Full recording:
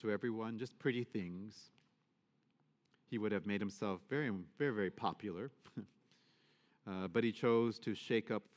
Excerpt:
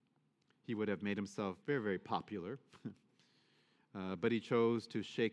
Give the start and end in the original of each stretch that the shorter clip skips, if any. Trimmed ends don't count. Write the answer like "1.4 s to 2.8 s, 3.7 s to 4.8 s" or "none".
4.0 s to 4.5 s